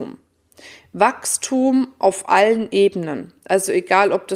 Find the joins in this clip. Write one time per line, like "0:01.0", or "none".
none

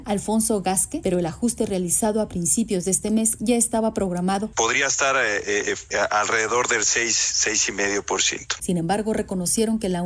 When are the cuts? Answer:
0:01.0
0:08.6

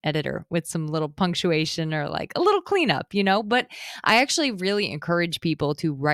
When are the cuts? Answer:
none

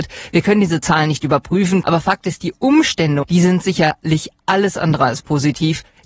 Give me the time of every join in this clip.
0:01.8
0:03.2

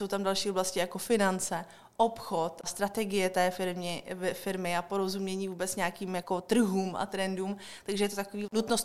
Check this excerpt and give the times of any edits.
none

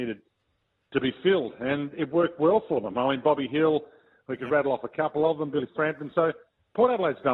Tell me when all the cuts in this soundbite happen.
none

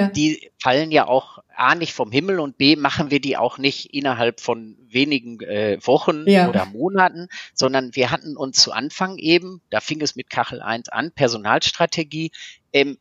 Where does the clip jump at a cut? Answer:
none

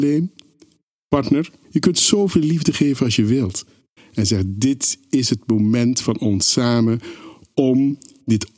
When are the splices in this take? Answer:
0:01.6
0:04.0

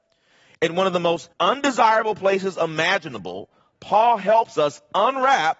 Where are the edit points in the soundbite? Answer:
0:01.3

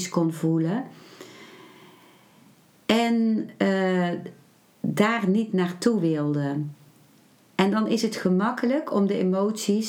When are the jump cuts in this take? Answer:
none

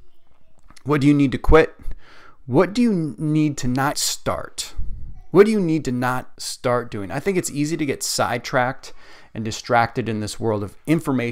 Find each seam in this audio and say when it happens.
0:03.9
0:06.4

